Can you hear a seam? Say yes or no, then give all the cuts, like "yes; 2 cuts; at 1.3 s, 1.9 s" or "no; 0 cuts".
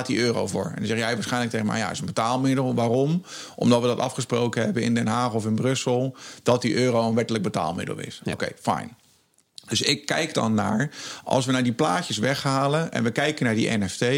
no; 0 cuts